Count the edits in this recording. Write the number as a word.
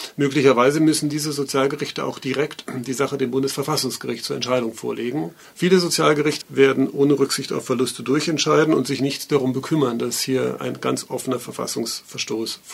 one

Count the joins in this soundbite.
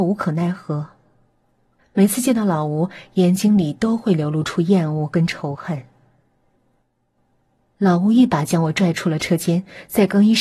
two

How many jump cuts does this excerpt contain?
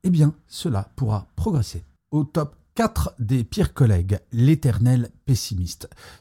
zero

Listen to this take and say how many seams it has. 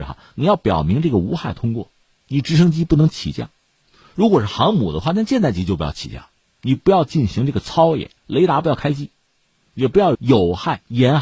one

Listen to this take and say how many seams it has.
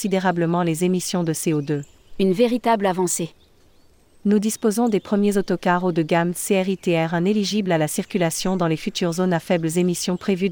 zero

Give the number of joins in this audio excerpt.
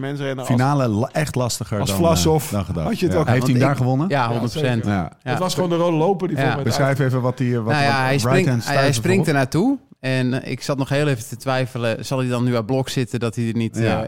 one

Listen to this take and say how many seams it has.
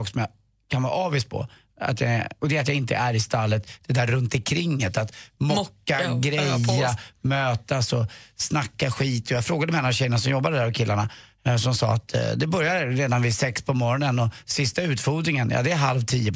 zero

